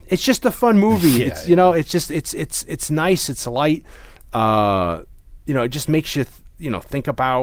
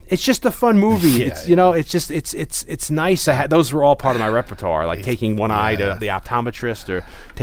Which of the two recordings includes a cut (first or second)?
second